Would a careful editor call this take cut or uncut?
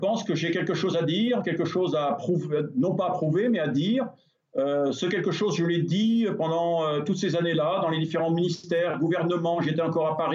uncut